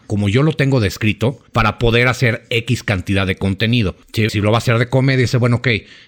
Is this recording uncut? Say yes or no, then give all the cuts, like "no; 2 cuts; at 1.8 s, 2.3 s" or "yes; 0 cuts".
no; 2 cuts; at 1.5 s, 4.3 s